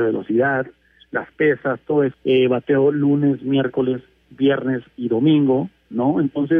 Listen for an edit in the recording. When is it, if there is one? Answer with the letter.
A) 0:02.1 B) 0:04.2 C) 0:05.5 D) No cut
A